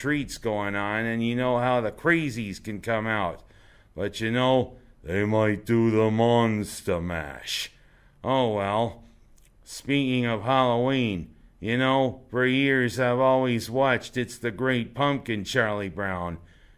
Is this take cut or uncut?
uncut